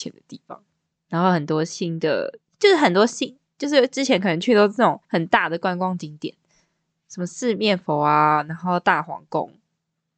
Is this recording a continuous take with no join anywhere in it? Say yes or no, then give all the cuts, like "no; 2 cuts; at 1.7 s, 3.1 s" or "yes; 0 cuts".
no; 1 cut; at 5.0 s